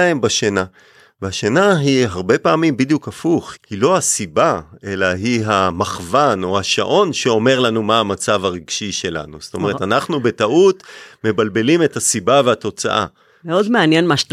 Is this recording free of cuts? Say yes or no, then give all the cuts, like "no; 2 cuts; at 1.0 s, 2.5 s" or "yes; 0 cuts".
no; 1 cut; at 3.6 s